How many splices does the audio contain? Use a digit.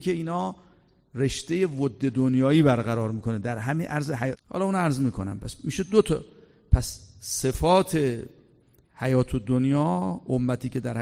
1